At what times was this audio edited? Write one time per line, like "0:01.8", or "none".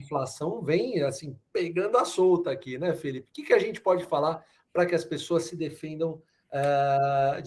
none